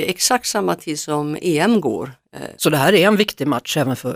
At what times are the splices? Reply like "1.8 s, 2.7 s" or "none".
2.5 s